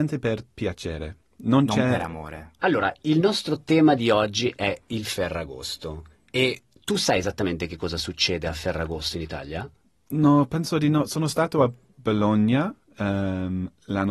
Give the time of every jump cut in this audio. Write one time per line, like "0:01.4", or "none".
0:02.6